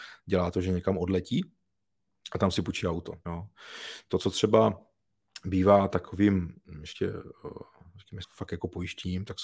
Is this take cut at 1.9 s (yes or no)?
no